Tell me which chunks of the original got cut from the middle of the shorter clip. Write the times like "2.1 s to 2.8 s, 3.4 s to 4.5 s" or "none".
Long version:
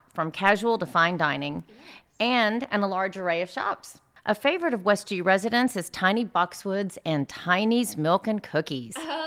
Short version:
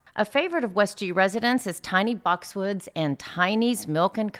none